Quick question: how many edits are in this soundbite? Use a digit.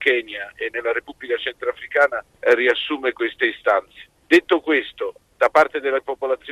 0